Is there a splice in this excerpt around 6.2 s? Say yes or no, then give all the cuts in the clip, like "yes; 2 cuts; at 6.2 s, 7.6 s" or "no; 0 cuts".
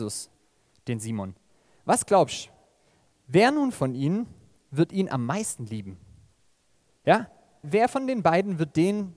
no; 1 cut; at 7.6 s